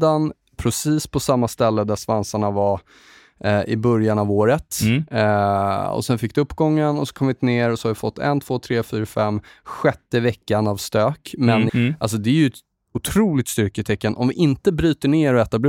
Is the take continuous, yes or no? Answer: no